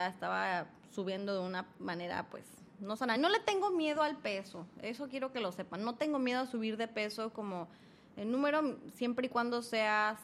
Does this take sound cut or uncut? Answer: uncut